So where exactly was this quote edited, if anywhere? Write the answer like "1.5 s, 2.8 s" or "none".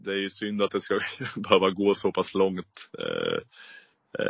none